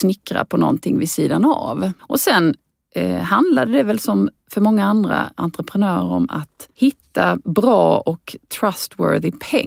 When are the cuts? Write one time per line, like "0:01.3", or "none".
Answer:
0:02.0
0:06.7